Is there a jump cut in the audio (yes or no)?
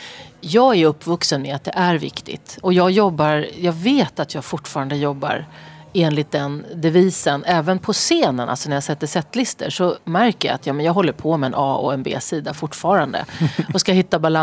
no